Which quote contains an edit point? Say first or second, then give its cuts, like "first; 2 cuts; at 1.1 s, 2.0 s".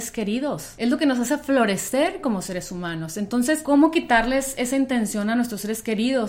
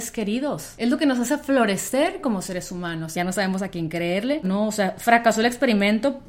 second; 2 cuts; at 3.1 s, 4.4 s